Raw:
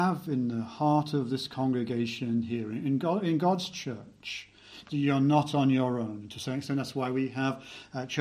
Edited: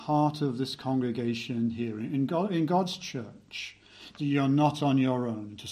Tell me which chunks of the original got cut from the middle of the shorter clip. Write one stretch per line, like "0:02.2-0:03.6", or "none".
none

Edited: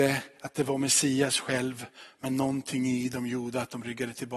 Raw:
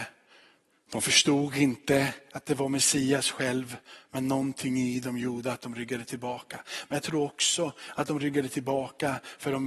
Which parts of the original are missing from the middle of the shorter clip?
none

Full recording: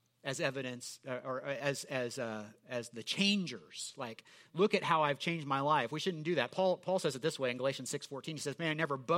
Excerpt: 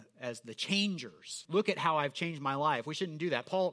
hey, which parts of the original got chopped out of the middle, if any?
0:03.9-0:04.5

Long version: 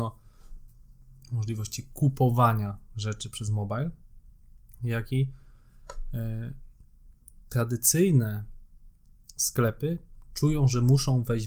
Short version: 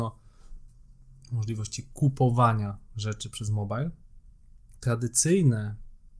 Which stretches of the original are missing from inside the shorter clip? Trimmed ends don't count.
0:04.8-0:07.5

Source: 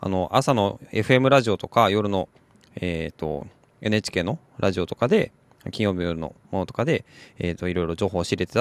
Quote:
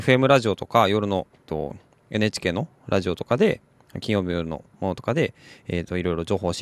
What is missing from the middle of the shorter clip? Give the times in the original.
0:02.4-0:03.1

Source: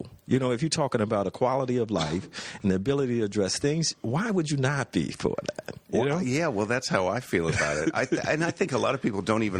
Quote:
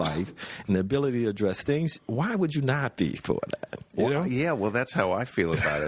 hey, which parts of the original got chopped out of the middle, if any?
none

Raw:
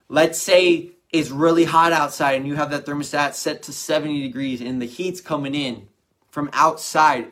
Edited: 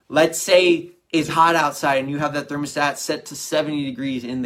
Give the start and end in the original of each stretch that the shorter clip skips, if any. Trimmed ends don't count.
0:01.3-0:01.7

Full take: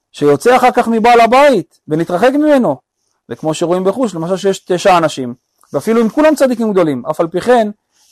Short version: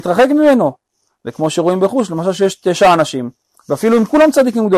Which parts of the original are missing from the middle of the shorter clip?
none

